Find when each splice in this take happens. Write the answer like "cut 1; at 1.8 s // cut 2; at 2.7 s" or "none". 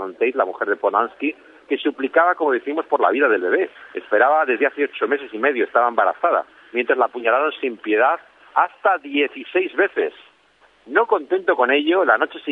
none